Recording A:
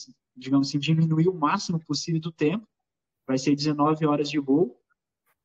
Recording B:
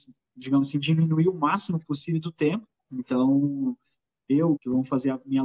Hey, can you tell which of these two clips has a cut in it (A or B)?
B